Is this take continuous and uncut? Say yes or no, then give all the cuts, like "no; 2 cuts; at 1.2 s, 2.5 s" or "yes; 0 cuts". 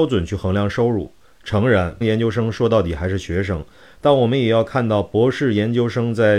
no; 1 cut; at 2.0 s